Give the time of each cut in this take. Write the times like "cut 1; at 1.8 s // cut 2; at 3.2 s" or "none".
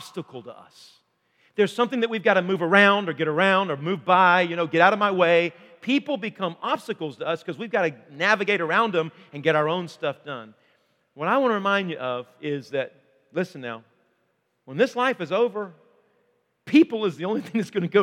none

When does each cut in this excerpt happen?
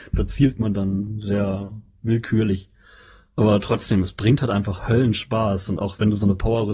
none

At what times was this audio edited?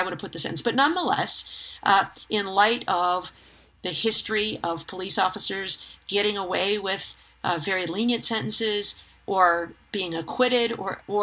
none

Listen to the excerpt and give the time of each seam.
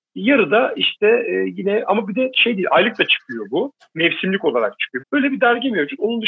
cut 1; at 5.0 s

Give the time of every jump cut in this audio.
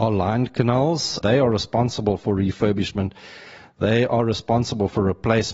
cut 1; at 1.2 s

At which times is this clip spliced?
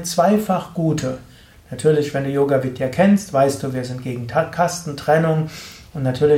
none

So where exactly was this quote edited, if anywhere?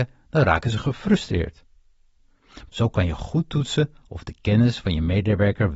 cut 1; at 2.7 s

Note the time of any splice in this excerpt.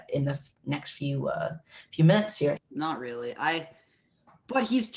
cut 1; at 2.6 s

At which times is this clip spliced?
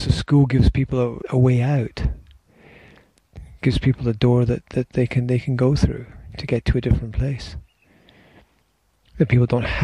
cut 1; at 1.2 s

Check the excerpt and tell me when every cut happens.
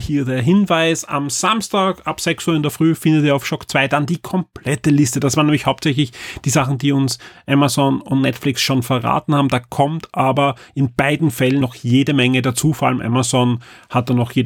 cut 1; at 11.6 s

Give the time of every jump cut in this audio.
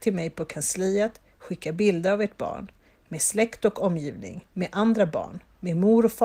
cut 1; at 4.5 s

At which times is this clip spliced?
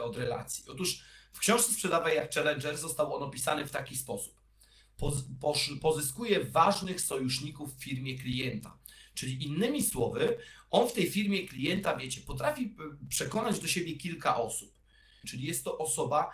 cut 1; at 15.2 s

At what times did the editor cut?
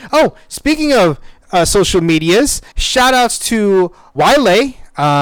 cut 1; at 2.7 s // cut 2; at 4.2 s

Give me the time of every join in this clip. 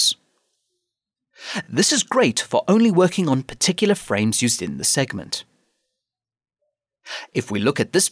none

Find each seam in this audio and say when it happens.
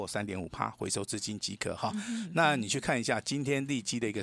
none

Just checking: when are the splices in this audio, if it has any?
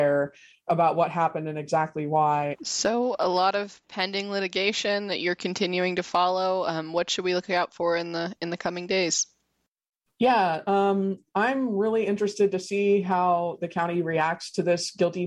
cut 1; at 2.5 s

